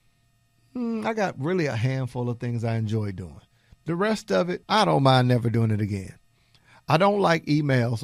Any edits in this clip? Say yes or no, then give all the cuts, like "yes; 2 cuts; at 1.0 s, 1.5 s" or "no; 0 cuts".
yes; 1 cut; at 4.6 s